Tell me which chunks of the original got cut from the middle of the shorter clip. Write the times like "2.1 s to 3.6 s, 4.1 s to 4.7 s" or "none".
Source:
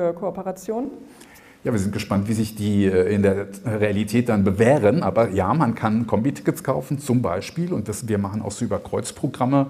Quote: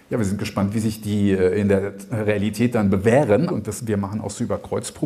5.0 s to 7.7 s